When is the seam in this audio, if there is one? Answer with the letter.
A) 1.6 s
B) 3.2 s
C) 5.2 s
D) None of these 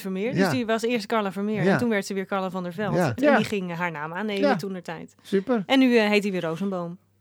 B